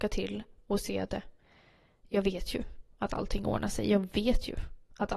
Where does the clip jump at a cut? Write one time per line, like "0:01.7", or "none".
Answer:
0:01.1